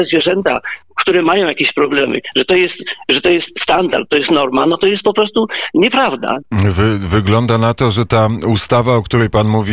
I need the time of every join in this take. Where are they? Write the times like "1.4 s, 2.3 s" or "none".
6.4 s